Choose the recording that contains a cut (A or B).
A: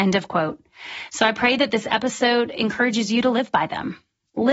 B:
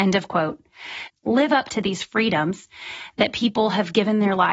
B